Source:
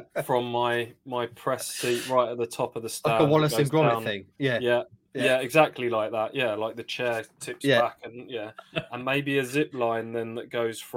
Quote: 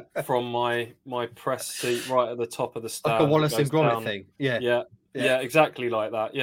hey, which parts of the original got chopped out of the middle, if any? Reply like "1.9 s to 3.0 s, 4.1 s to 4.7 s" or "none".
none